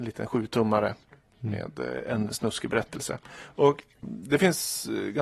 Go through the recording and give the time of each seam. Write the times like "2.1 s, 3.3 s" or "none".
4.0 s